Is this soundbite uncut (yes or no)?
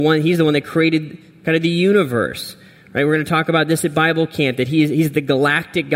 yes